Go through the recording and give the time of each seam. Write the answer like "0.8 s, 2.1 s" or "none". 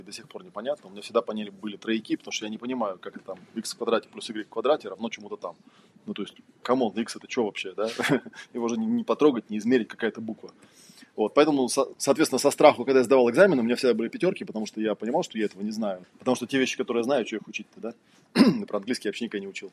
9.9 s, 11.9 s, 16.0 s